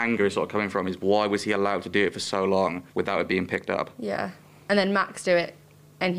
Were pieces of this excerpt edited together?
yes; 1 cut; at 2.9 s

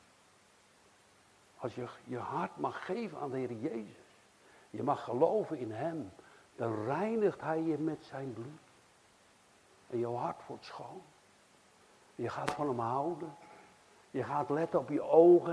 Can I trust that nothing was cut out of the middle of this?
yes; 0 cuts

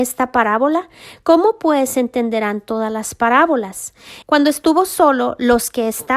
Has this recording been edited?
yes; 1 cut; at 4.2 s

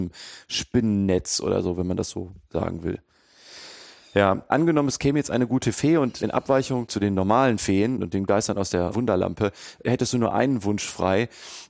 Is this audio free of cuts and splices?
no; 1 cut; at 4.5 s

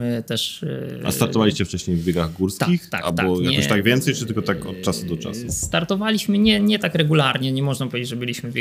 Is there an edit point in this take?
no; 0 cuts

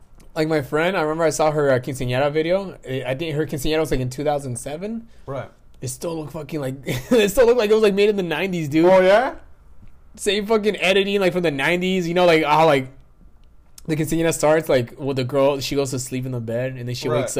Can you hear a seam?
no; 0 cuts

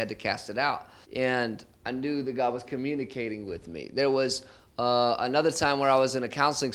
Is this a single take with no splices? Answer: no; 1 cut; at 1.0 s

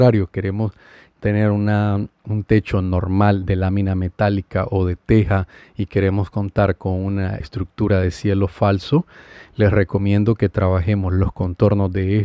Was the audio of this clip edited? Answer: yes; 2 cuts; at 2.2 s, 7.4 s

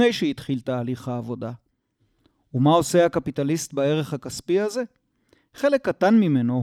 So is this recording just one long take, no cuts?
yes; 0 cuts

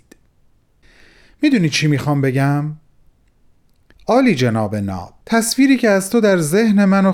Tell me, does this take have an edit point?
yes; 2 cuts; at 3.9 s, 5.2 s

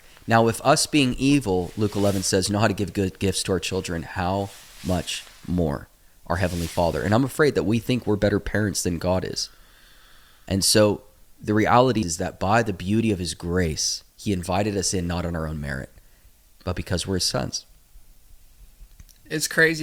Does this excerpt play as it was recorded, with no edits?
no; 1 cut; at 12.0 s

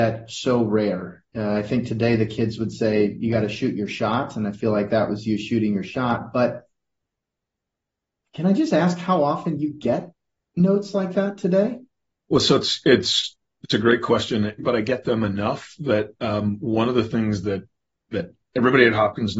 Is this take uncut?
no; 1 cut; at 14.6 s

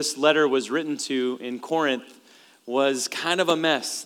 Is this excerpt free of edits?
yes; 0 cuts

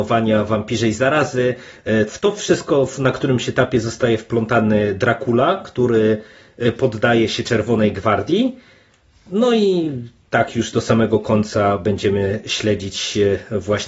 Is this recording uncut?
no; 1 cut; at 2.1 s

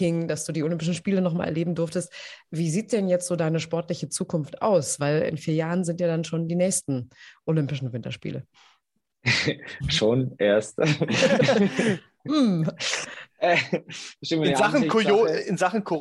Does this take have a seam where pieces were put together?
no; 0 cuts

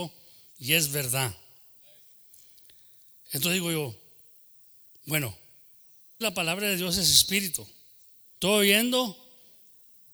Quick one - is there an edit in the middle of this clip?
yes; 2 cuts; at 6.2 s, 8.4 s

